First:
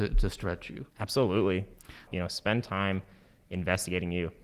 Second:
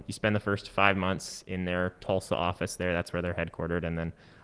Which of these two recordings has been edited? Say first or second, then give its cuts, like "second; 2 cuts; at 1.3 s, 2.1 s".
first; 2 cuts; at 0.9 s, 2.1 s